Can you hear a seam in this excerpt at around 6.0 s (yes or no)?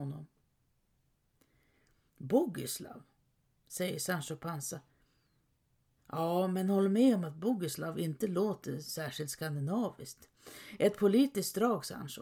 yes